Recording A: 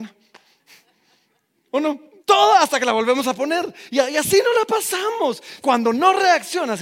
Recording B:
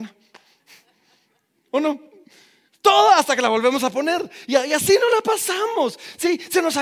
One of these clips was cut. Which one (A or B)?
A